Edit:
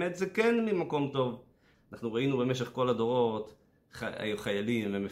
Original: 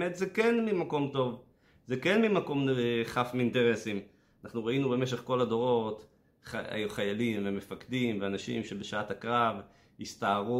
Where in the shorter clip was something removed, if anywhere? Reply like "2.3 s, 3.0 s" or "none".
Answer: 1.7 s